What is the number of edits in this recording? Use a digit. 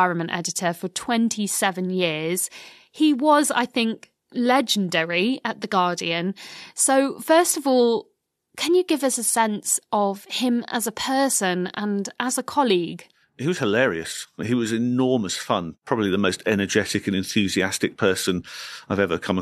0